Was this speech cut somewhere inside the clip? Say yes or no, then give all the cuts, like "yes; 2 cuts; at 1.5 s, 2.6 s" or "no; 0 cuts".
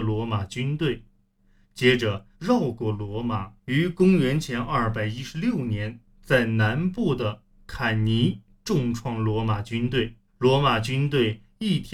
yes; 3 cuts; at 2.3 s, 3.6 s, 10.3 s